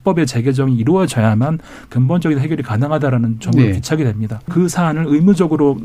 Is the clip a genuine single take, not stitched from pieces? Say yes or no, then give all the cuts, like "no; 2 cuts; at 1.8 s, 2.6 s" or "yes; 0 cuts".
no; 1 cut; at 4.5 s